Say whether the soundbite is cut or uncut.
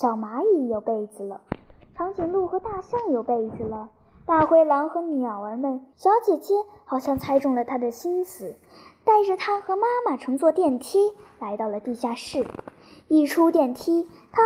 cut